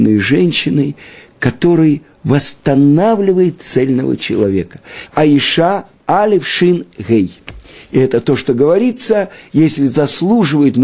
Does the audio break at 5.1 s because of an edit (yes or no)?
yes